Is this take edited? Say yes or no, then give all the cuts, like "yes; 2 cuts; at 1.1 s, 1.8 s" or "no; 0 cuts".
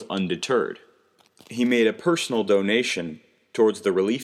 no; 0 cuts